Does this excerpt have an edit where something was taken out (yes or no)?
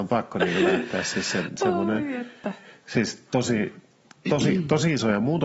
no